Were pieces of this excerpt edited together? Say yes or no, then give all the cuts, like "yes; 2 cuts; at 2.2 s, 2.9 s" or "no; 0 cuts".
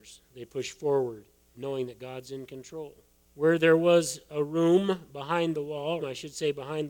yes; 3 cuts; at 1.5 s, 3.2 s, 6.0 s